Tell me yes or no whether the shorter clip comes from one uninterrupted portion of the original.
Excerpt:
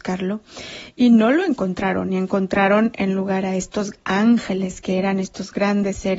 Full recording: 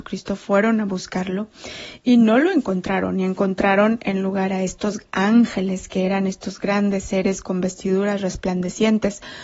yes